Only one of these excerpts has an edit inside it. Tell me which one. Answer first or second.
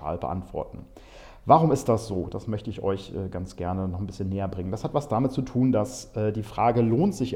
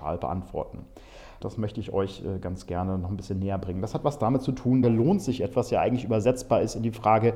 second